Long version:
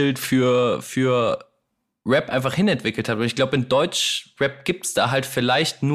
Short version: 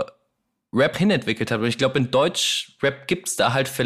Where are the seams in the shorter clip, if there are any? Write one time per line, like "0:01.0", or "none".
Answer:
0:00.9